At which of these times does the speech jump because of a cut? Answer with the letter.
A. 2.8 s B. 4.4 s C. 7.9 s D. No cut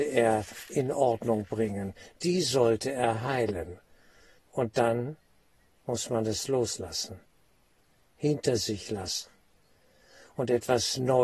B